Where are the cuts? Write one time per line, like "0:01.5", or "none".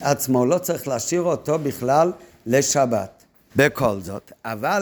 0:03.5